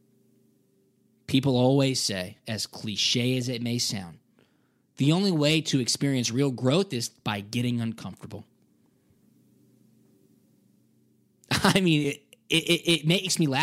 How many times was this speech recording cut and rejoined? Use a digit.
0